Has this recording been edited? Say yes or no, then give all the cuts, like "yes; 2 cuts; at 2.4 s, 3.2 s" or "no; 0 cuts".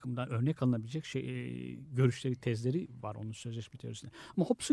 no; 0 cuts